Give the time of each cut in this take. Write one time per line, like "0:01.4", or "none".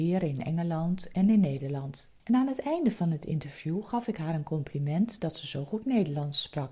0:02.2